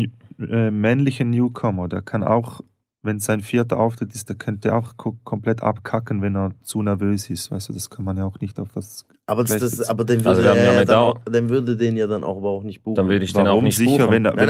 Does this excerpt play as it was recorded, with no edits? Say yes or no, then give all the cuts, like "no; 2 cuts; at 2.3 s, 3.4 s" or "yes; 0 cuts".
no; 1 cut; at 9.5 s